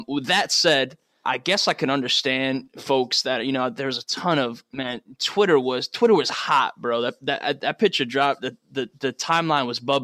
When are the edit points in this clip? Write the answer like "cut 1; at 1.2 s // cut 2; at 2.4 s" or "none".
cut 1; at 1.2 s